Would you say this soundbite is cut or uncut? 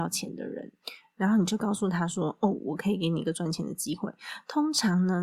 uncut